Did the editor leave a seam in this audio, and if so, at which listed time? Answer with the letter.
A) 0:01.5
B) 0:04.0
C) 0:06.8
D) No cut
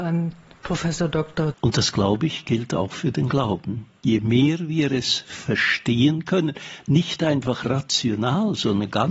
A